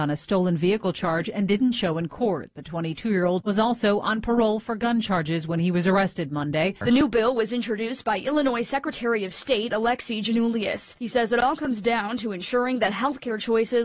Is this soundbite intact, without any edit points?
no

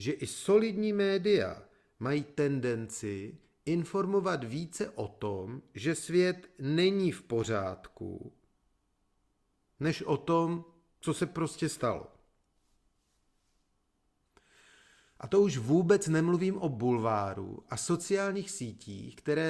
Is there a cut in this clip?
no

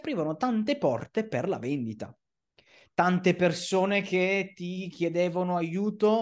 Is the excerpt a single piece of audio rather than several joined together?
yes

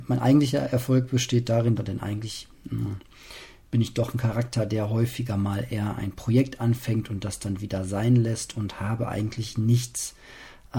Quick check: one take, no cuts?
no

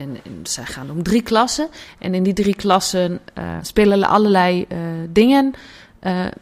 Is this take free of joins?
no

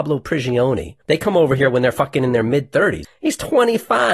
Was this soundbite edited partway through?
yes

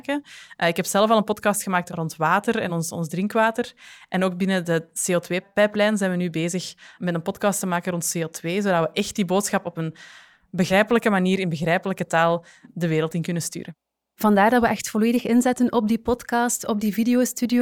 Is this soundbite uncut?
yes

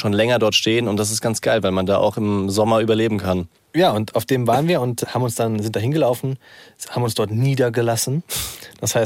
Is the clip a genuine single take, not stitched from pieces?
yes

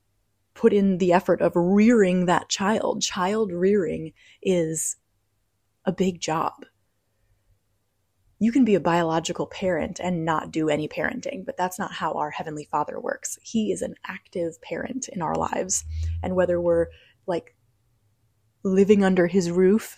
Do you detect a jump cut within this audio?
no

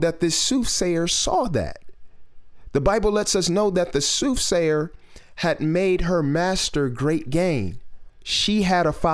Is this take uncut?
no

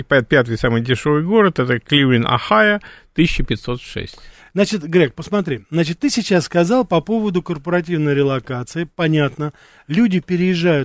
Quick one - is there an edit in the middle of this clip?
no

